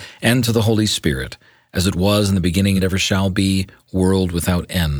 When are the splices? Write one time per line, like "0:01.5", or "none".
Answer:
0:02.8